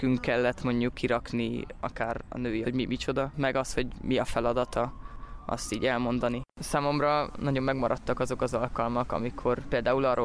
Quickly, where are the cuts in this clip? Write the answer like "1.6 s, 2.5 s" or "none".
2.6 s